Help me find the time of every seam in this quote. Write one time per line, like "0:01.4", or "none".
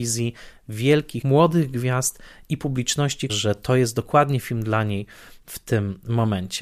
0:01.2
0:03.3